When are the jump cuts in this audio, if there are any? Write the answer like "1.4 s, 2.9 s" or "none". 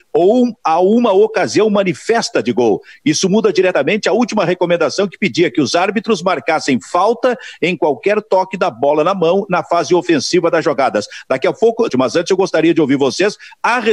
11.9 s